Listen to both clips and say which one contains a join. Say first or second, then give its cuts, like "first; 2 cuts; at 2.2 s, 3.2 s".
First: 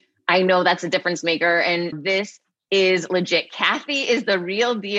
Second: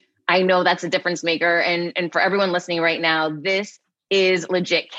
first; 1 cut; at 1.9 s